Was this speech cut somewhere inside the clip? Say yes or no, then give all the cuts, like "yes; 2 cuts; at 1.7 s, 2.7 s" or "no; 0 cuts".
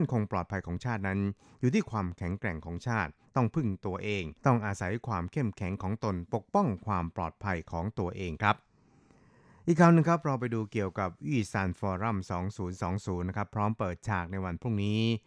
yes; 1 cut; at 4.4 s